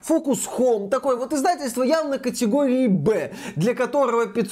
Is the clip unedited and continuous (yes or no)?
yes